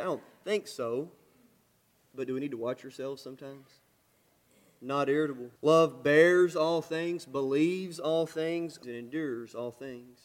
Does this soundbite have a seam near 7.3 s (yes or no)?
no